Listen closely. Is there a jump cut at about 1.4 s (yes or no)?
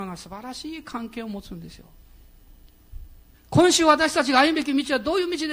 no